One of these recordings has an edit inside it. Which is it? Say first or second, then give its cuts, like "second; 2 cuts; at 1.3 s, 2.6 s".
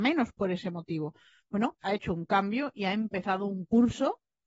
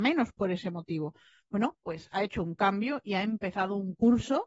first; 1 cut; at 1.8 s